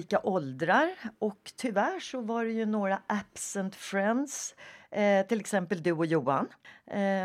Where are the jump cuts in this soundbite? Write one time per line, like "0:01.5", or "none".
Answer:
none

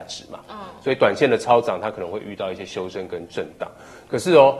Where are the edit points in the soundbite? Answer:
none

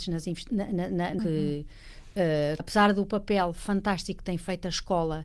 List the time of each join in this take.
0:01.2
0:02.6

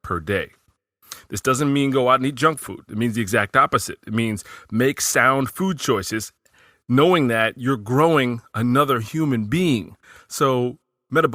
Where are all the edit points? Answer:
none

